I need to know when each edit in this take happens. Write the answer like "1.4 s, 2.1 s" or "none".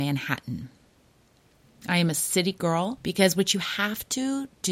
3.0 s